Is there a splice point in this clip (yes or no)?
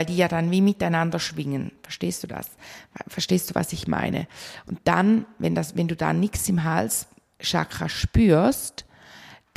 no